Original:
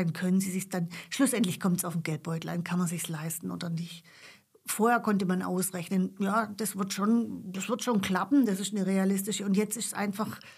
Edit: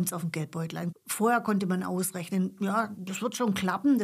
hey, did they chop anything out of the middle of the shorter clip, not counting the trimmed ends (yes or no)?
yes